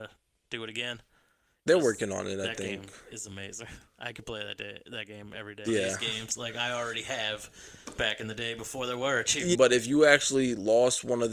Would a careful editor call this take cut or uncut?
cut